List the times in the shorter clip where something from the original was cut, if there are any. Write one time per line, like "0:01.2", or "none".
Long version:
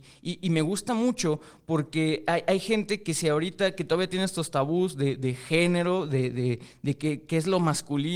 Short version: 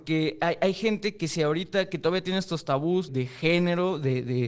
0:03.1